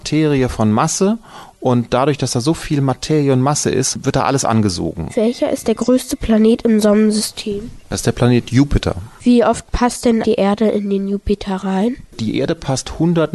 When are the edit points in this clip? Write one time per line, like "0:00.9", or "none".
0:05.1
0:10.2